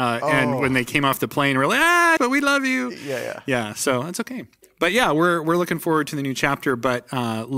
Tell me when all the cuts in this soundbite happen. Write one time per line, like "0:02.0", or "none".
0:02.2